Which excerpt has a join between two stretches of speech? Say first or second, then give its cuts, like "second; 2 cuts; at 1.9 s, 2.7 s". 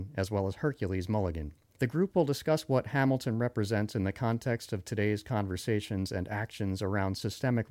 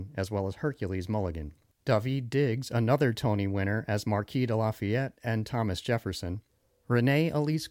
second; 1 cut; at 1.7 s